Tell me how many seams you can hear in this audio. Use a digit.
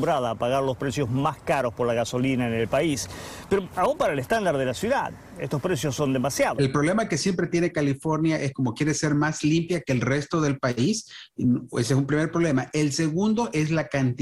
1